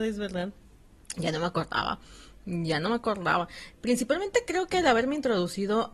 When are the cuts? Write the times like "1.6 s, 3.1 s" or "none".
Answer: 3.8 s